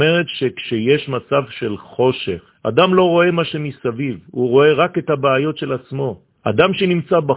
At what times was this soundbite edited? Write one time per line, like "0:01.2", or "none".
0:02.5
0:06.4